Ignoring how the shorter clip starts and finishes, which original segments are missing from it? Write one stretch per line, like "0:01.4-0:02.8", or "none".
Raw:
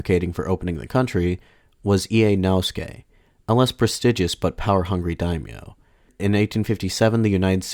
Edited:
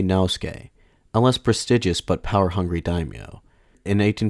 none